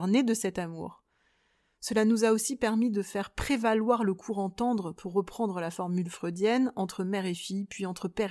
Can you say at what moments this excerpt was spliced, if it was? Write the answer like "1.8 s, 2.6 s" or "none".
none